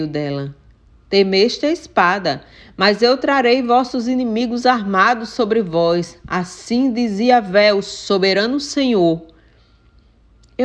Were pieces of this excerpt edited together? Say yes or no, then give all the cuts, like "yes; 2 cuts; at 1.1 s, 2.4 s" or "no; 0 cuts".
no; 0 cuts